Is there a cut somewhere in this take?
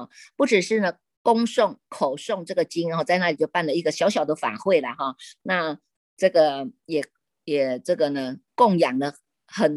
no; 0 cuts

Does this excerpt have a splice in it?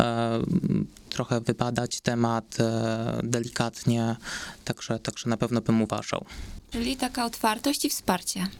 yes; 1 cut; at 6.7 s

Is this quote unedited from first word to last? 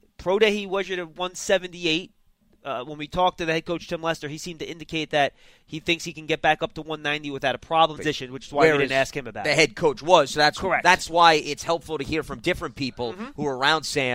no; 1 cut; at 8.0 s

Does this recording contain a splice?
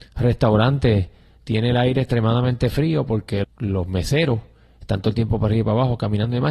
yes; 1 cut; at 3.4 s

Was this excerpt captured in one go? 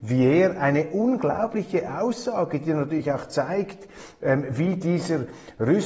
yes; 0 cuts

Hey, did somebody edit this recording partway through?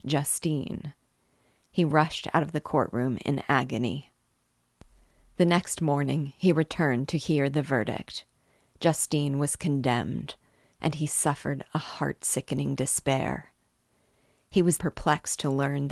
yes; 1 cut; at 14.8 s

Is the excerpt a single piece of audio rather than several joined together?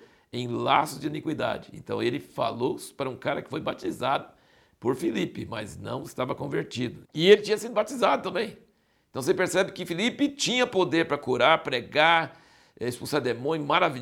no; 1 cut; at 7.0 s

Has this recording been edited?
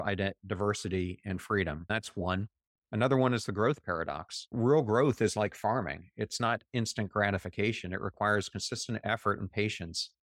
no; 0 cuts

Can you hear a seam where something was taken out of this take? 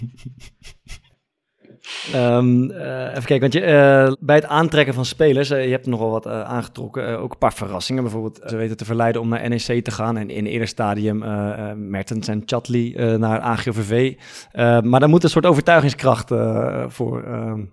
yes; 2 cuts; at 4.1 s, 8.5 s

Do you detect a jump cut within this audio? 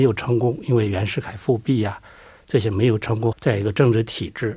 yes; 1 cut; at 3.3 s

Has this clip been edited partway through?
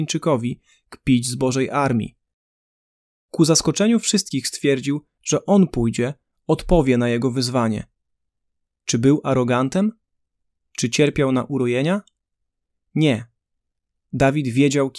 no; 0 cuts

